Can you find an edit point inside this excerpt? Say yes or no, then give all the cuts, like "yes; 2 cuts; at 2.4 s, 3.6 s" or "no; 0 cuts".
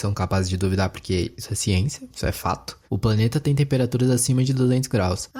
yes; 1 cut; at 2.8 s